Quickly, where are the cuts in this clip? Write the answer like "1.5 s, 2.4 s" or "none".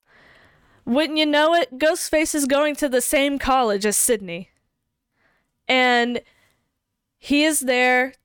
none